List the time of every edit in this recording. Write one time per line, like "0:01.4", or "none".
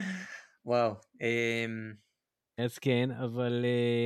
0:02.6